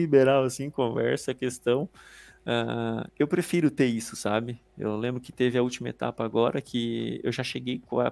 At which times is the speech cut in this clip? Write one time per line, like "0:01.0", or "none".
0:03.1